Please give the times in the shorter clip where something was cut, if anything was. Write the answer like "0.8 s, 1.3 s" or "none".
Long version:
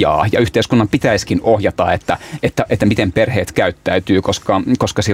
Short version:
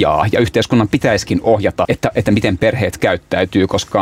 1.9 s